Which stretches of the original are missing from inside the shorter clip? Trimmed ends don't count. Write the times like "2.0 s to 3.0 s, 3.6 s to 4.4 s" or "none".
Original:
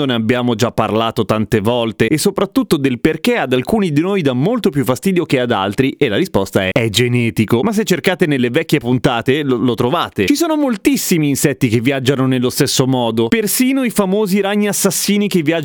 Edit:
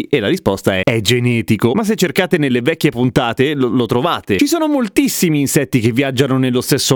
none